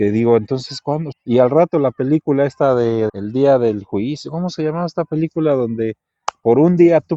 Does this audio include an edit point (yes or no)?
yes